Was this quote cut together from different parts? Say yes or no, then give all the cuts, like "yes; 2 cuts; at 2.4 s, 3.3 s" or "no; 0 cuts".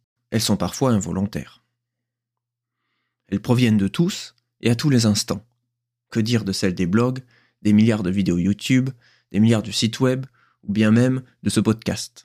no; 0 cuts